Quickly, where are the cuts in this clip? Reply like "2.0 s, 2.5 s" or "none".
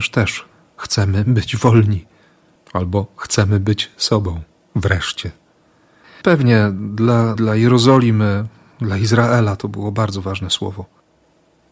6.2 s, 7.4 s